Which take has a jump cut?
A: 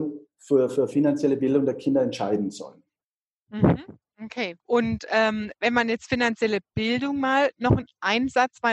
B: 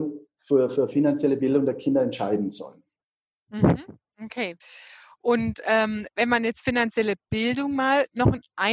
A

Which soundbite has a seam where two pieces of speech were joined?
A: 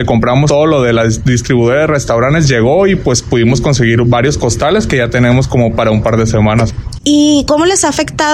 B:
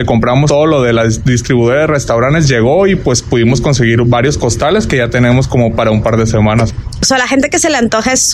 A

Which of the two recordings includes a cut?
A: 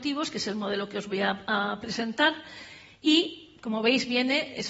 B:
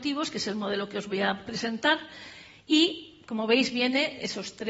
B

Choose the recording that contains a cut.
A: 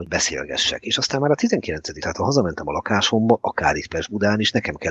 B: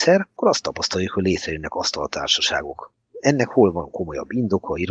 A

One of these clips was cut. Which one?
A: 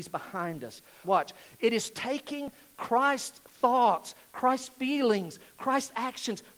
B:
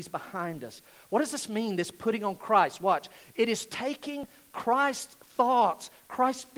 A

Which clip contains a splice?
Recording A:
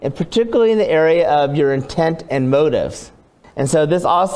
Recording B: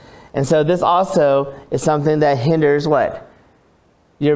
A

